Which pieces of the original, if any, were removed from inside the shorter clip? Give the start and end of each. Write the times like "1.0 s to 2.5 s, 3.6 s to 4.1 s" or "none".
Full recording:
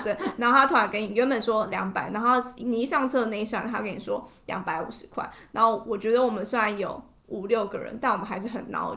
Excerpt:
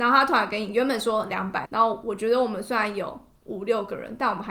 2.1 s to 5.5 s